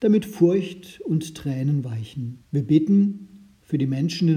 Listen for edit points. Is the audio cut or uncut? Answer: cut